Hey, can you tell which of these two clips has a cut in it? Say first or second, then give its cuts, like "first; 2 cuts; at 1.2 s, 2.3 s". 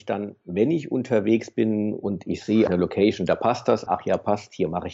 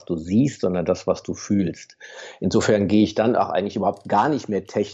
first; 2 cuts; at 2.7 s, 3.9 s